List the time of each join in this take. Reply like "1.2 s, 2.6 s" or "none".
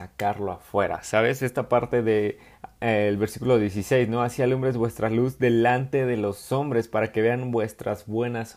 none